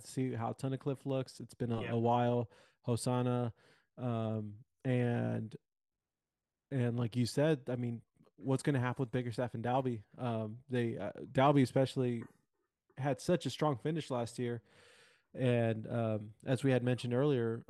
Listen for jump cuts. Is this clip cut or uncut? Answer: uncut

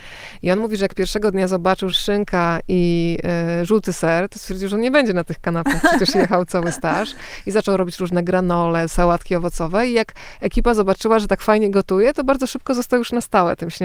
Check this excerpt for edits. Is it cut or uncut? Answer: cut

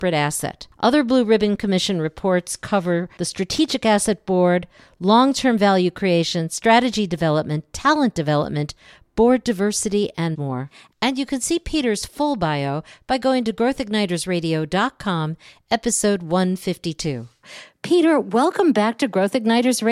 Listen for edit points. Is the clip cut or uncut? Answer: uncut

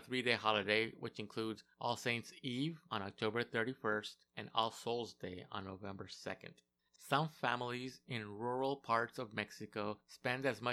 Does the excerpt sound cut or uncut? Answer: cut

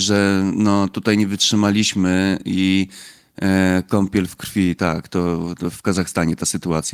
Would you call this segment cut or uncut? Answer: cut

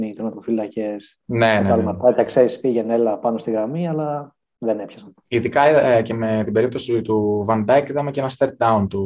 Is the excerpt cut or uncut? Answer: uncut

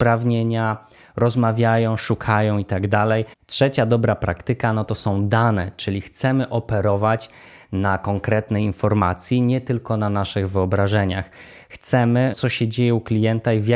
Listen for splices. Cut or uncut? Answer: cut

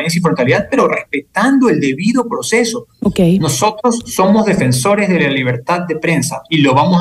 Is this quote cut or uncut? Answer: cut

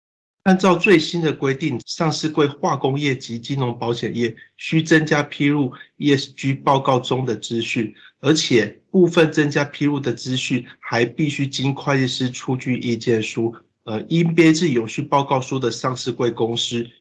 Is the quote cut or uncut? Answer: cut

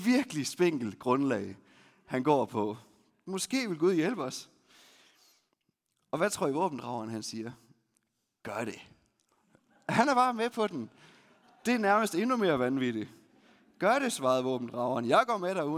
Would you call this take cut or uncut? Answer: uncut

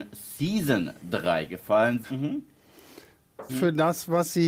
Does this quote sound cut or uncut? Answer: cut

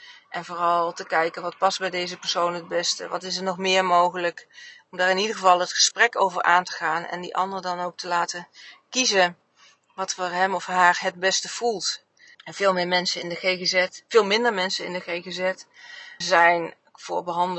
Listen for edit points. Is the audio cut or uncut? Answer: cut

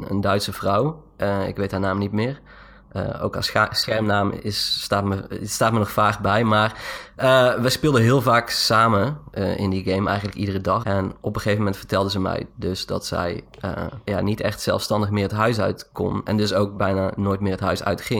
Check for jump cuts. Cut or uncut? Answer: cut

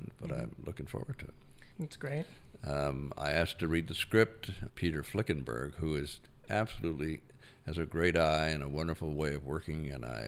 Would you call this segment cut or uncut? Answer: cut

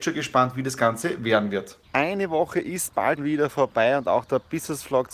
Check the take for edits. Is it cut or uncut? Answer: cut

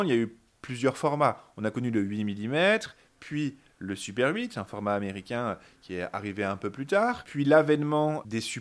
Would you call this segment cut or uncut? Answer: uncut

